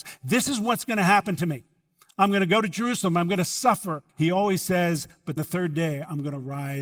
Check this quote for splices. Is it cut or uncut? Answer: cut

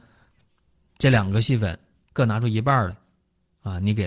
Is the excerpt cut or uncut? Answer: uncut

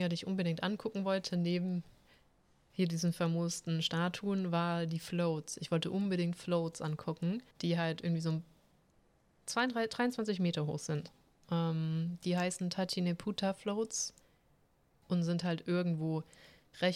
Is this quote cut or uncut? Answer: cut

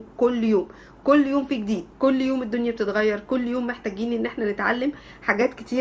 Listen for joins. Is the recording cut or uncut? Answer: cut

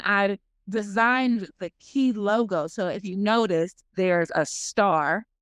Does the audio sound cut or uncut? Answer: cut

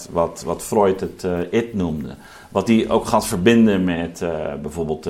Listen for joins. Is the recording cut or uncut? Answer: uncut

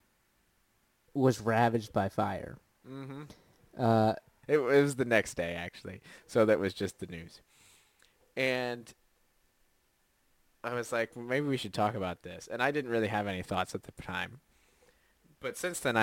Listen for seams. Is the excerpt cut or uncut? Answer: cut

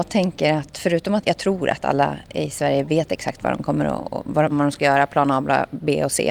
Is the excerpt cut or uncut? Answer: cut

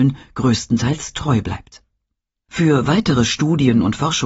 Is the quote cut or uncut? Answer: cut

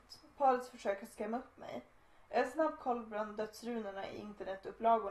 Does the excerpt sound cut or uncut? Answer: uncut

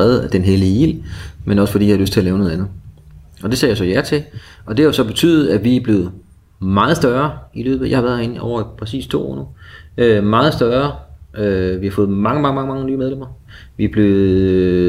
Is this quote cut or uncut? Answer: uncut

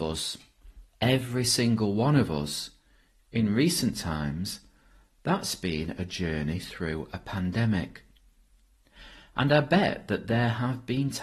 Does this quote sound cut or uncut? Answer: uncut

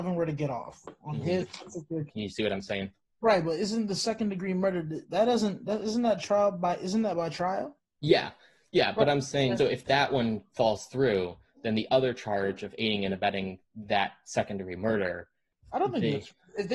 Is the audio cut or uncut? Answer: cut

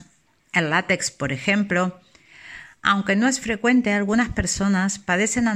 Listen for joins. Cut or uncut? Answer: uncut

